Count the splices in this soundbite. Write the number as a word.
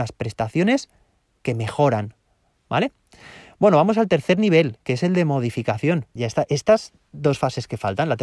one